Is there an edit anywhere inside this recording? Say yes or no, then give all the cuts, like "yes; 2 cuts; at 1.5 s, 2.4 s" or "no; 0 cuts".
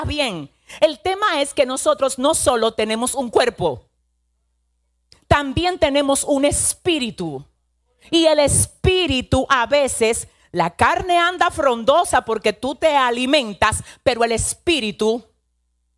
no; 0 cuts